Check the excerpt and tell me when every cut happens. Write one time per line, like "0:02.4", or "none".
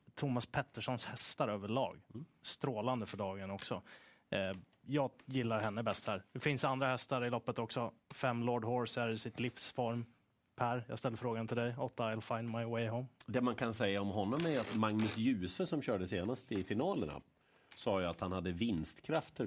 none

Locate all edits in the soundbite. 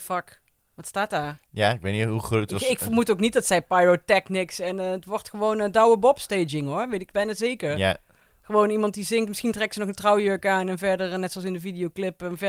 none

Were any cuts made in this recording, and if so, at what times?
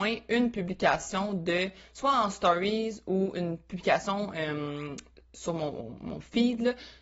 none

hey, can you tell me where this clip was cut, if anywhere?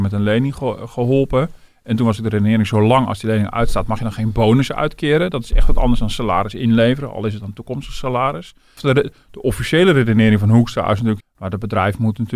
0:08.8
0:11.2

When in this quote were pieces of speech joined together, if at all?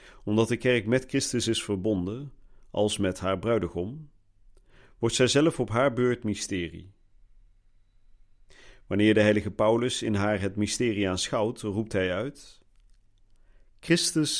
none

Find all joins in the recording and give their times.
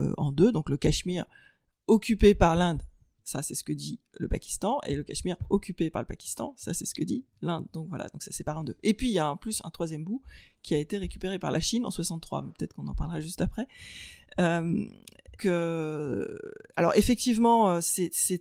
0:15.4

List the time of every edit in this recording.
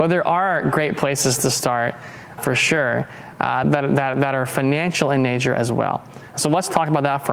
0:02.4
0:03.6

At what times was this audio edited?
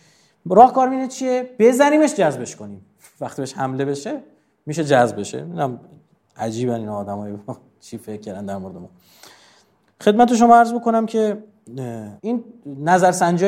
0:12.2

